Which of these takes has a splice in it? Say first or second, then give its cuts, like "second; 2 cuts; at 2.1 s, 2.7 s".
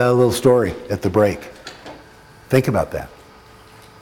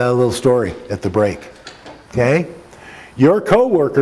second; 1 cut; at 2.0 s